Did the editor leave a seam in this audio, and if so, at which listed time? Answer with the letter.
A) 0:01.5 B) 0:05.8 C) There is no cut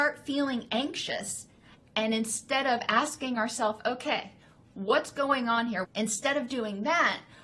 B